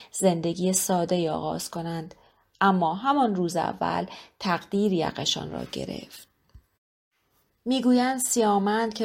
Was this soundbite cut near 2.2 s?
no; 0 cuts

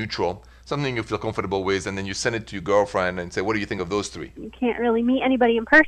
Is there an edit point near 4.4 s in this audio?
yes; 1 cut; at 4.4 s

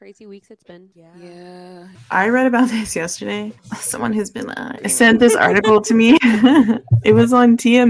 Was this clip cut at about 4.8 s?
yes; 2 cuts; at 2.0 s, 4.8 s

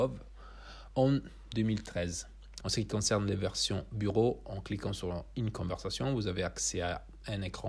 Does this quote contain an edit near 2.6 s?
yes; 1 cut; at 2.6 s

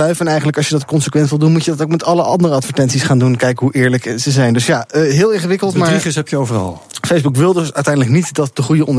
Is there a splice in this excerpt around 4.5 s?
no; 0 cuts

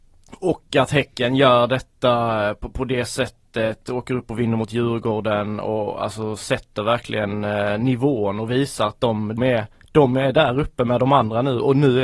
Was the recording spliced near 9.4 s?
yes; 1 cut; at 9.4 s

